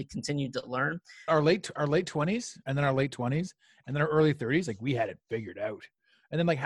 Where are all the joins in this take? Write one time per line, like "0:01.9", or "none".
0:01.3
0:02.6